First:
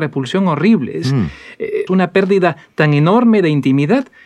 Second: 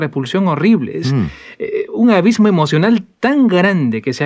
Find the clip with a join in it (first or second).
first